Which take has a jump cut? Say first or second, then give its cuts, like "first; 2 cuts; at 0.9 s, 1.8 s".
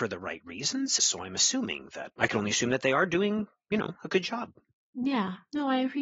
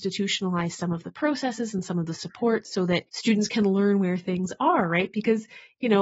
first; 1 cut; at 1.0 s